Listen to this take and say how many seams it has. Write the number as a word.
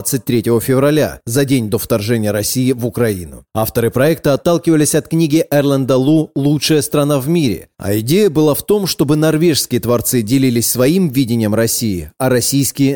zero